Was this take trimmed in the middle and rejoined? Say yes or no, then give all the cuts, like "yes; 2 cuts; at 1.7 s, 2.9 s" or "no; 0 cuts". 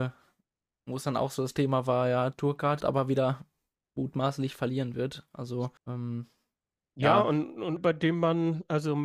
yes; 3 cuts; at 2.8 s, 5.8 s, 7.8 s